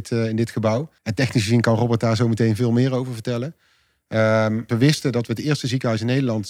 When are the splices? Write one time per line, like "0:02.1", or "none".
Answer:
0:01.0
0:04.7